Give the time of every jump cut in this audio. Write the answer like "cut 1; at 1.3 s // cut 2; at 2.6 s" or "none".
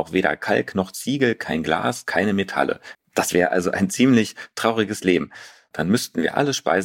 cut 1; at 2.9 s // cut 2; at 5.7 s